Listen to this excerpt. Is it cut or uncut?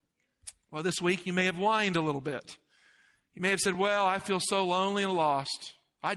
uncut